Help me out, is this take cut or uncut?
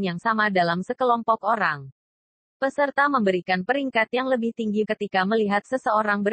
cut